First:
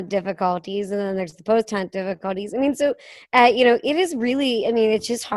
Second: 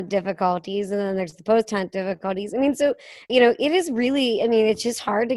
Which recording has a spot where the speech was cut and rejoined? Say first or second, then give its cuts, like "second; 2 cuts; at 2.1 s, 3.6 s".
second; 1 cut; at 3.3 s